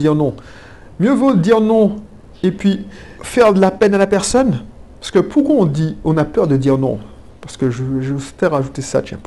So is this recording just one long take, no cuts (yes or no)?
no